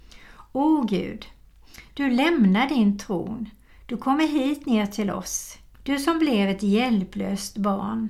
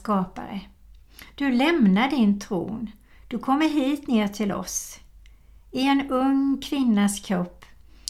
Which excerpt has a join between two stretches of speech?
first; 2 cuts; at 1.9 s, 5.7 s

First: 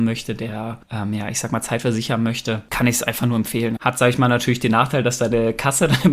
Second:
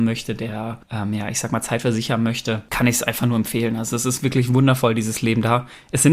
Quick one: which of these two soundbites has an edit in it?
first; 1 cut; at 3.8 s

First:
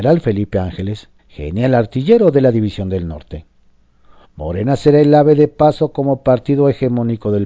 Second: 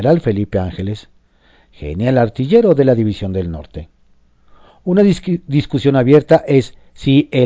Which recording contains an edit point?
first; 2 cuts; at 1.2 s, 4.2 s

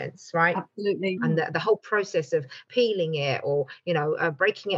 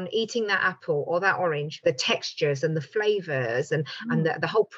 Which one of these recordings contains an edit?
first; 1 cut; at 1.2 s

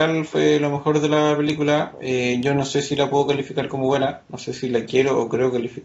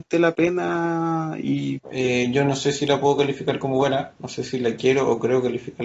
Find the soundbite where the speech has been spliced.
second; 1 cut; at 1.8 s

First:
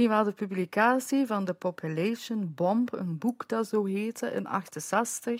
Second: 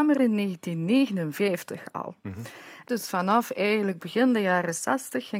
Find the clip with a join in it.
second; 1 cut; at 2.2 s

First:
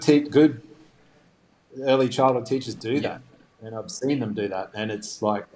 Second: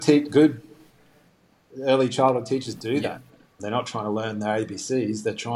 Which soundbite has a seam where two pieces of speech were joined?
second; 1 cut; at 3.6 s

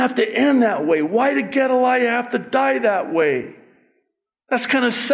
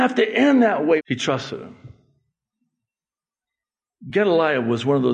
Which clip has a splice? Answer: second; 1 cut; at 1.0 s

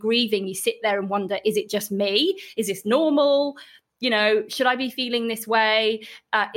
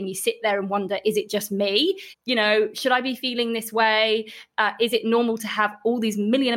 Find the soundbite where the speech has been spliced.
second; 1 cut; at 2.1 s

